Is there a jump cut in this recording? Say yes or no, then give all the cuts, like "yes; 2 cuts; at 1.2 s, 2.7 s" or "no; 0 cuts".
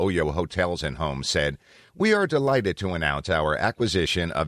no; 0 cuts